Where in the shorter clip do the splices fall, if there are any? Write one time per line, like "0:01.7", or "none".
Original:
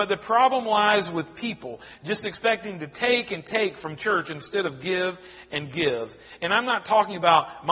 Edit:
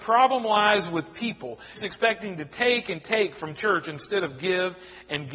0:01.8